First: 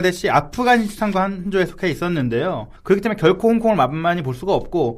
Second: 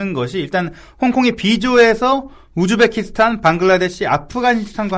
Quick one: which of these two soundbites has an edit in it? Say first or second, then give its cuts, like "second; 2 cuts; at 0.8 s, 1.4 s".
first; 1 cut; at 2.8 s